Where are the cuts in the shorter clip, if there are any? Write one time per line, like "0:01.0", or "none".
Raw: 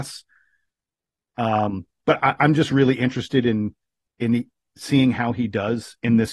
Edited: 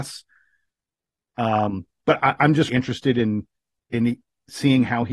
0:02.7